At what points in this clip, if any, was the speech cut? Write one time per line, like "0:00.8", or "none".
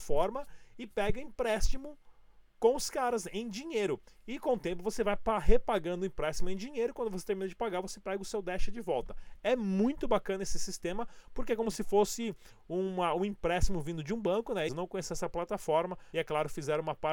0:14.7
0:16.1